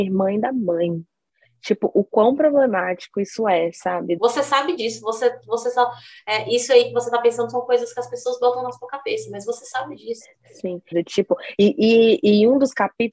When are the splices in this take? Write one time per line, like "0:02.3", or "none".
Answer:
0:04.2
0:10.9